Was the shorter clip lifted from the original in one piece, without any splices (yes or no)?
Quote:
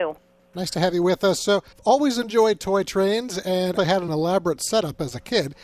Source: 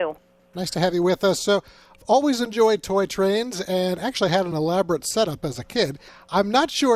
no